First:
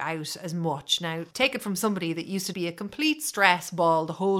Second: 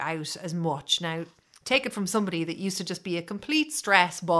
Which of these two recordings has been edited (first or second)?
first